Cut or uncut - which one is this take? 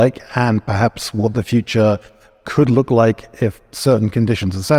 uncut